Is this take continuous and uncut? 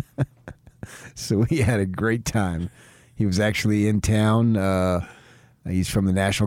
yes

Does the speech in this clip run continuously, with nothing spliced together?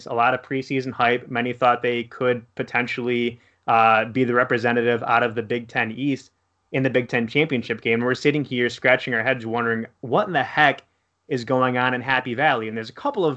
yes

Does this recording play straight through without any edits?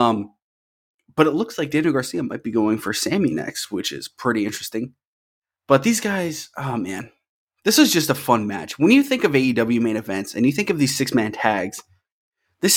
yes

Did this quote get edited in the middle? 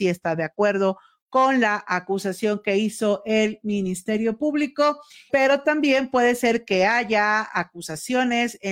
yes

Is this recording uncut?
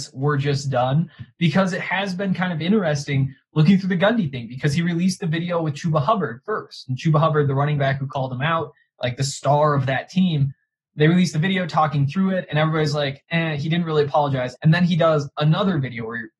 no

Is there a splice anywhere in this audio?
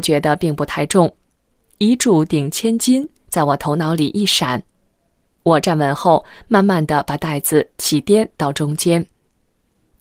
no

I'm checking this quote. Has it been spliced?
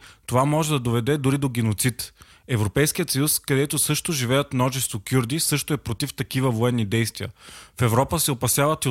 no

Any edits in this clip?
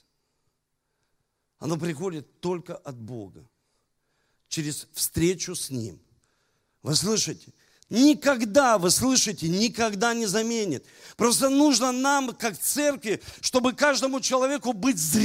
yes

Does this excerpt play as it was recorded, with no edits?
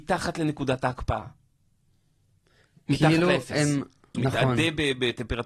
no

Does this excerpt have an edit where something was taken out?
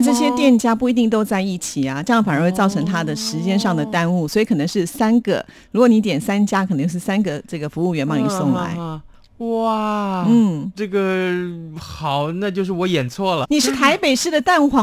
yes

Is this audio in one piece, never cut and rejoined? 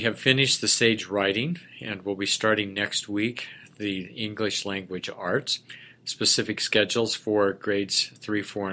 yes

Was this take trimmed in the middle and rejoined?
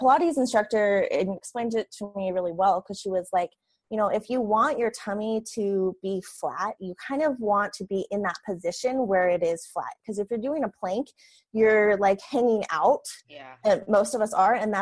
no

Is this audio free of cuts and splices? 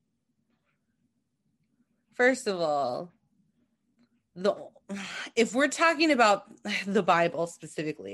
yes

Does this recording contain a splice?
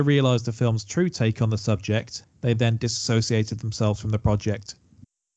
yes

